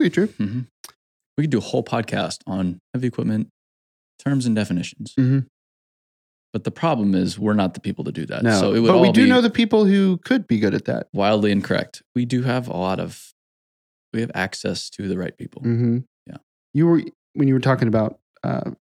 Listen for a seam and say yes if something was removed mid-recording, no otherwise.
no